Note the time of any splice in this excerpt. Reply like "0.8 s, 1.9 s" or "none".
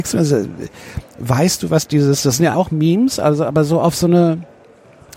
2.5 s